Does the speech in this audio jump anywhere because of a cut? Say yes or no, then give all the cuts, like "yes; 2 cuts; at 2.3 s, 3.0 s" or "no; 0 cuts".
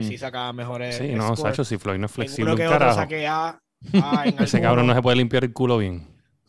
no; 0 cuts